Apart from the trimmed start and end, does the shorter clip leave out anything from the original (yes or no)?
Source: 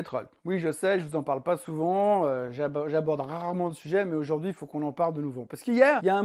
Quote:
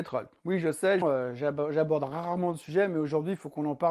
yes